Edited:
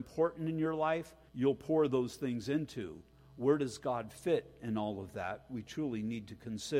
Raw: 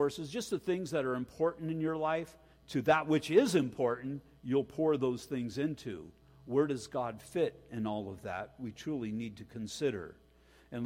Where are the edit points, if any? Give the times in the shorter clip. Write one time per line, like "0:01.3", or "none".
0:01.3